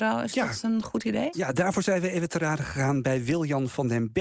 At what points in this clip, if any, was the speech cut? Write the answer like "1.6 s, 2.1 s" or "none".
1.3 s